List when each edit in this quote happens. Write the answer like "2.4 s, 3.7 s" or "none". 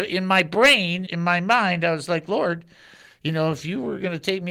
1.0 s